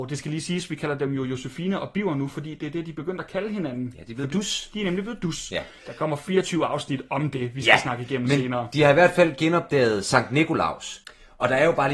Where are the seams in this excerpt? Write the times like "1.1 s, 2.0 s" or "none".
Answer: 5.8 s